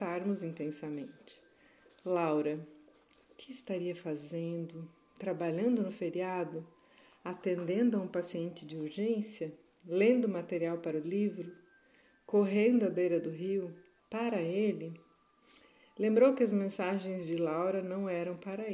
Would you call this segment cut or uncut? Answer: cut